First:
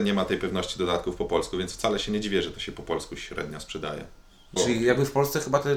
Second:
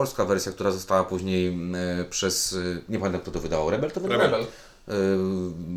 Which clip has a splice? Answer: first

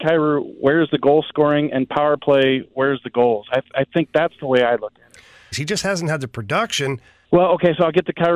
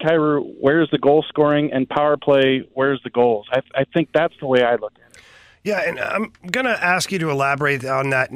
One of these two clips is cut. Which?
first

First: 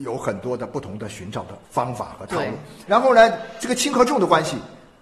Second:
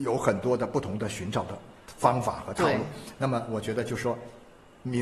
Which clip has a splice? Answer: first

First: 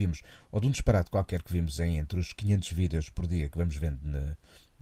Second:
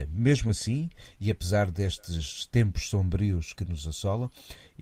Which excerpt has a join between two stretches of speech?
second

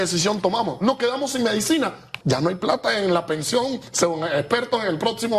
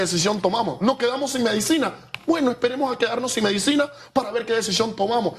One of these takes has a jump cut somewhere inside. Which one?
first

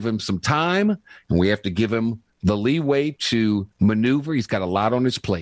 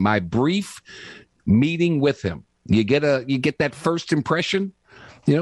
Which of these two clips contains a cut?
first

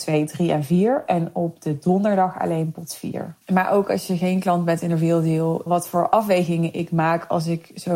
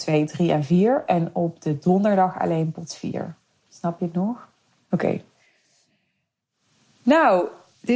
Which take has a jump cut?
first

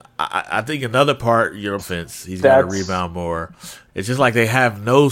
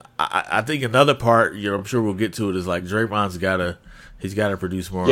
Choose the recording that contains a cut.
first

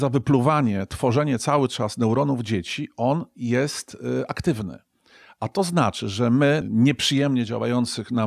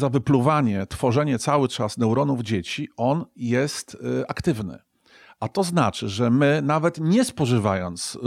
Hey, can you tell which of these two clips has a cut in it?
first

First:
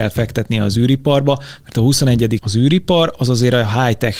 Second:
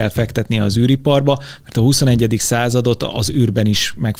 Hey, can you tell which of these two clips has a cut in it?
first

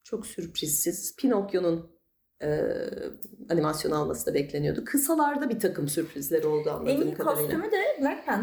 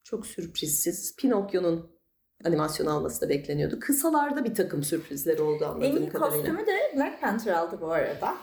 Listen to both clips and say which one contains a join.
second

